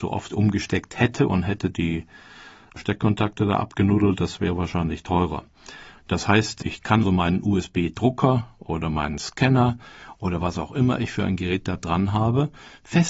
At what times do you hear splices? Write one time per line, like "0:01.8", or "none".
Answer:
0:06.0
0:07.0